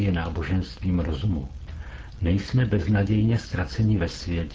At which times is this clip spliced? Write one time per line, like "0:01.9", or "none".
none